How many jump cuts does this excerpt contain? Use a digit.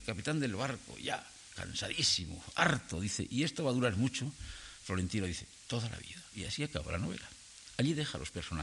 1